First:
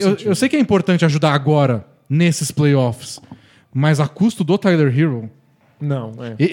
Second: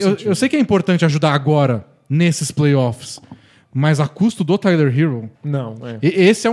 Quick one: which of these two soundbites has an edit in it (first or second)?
second